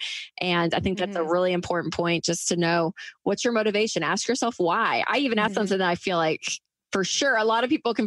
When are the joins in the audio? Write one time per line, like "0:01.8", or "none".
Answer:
0:05.5